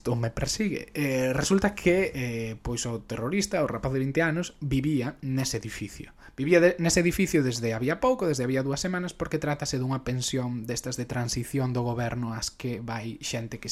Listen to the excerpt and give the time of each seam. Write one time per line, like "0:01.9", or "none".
none